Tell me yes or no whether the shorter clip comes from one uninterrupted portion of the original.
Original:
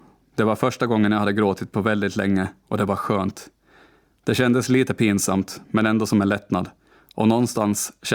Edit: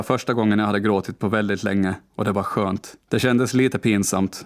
no